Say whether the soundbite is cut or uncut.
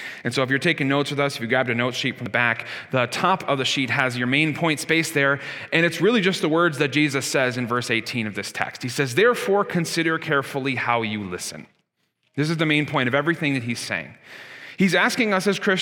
uncut